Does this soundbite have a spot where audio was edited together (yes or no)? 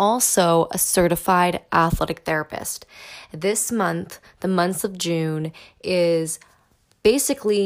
no